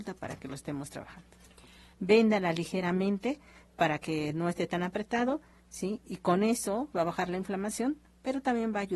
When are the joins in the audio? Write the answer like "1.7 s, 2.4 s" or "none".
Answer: 1.9 s, 6.9 s